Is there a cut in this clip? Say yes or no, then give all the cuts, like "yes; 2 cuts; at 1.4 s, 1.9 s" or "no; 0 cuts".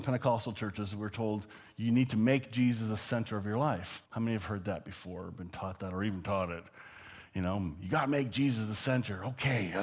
yes; 1 cut; at 4.1 s